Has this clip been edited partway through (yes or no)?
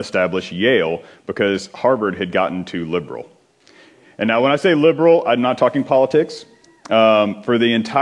no